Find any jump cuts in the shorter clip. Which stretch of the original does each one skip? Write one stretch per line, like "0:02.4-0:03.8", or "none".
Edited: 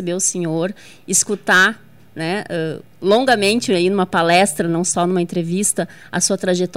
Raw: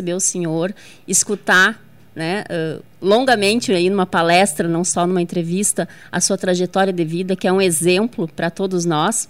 none